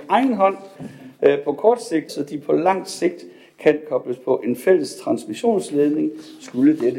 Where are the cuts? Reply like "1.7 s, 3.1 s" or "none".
2.1 s